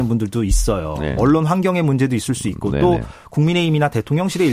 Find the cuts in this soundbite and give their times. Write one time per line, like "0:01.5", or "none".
0:01.2

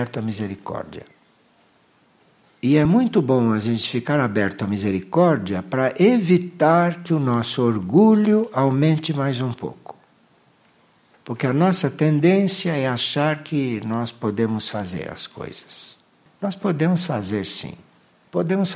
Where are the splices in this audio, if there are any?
none

